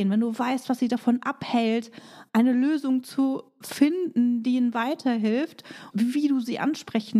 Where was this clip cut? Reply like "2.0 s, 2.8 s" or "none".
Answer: 5.9 s